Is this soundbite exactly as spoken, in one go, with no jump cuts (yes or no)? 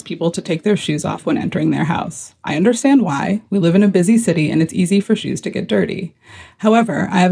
yes